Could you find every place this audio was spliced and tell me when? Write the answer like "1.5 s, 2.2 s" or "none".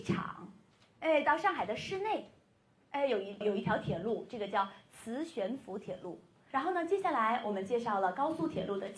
3.4 s, 6.5 s